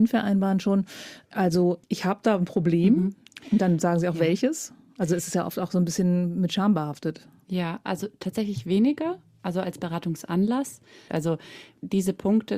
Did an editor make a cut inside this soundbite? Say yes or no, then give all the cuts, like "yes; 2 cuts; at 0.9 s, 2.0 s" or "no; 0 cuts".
yes; 1 cut; at 11.1 s